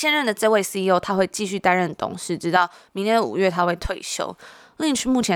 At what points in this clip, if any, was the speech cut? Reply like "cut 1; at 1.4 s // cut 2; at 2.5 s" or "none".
none